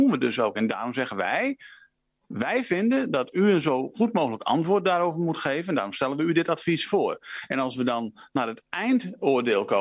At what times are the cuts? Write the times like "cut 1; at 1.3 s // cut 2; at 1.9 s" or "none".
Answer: none

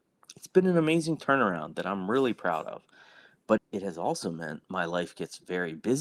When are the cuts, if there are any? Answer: cut 1; at 3.6 s

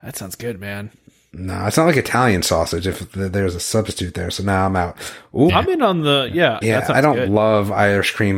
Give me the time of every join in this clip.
cut 1; at 5.5 s // cut 2; at 6.6 s

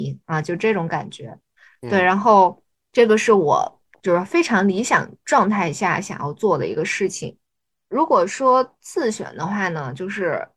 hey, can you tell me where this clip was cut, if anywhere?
none

